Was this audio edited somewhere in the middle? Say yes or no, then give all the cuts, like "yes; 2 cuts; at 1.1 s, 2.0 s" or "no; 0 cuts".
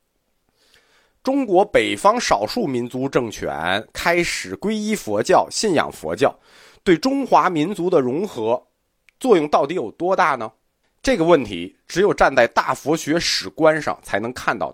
yes; 1 cut; at 10.8 s